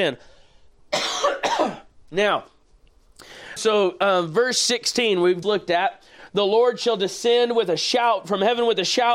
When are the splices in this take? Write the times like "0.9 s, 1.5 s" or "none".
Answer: 3.6 s, 5.4 s